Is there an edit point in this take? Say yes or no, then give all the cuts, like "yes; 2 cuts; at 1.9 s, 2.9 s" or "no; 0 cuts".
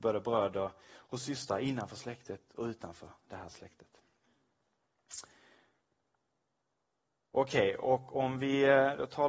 no; 0 cuts